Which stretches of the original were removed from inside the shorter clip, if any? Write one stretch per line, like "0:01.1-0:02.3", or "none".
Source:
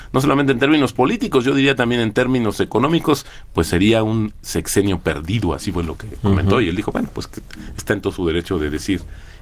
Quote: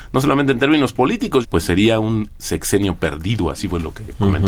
0:01.4-0:03.5